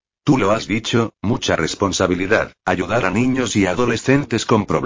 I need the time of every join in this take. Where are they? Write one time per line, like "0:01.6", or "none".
0:02.6